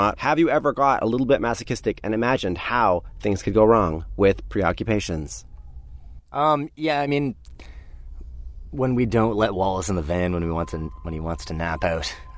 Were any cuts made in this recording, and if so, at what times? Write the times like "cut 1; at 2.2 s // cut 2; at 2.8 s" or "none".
none